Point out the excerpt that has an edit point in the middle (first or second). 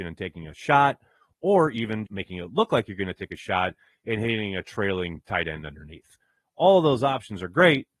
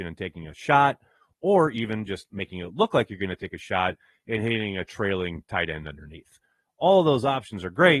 first